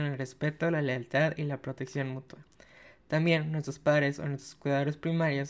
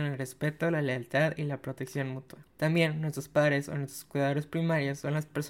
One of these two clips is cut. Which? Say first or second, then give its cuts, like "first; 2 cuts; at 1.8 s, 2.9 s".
second; 1 cut; at 2.5 s